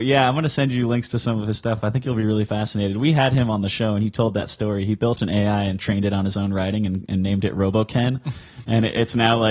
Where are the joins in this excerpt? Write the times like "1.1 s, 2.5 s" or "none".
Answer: none